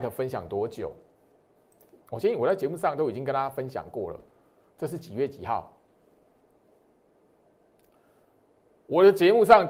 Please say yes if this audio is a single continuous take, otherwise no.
no